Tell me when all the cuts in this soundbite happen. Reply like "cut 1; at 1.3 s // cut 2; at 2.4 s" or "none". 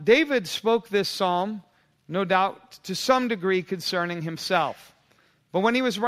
none